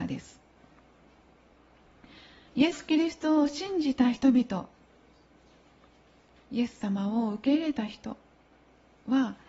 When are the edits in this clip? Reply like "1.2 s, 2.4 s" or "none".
2.5 s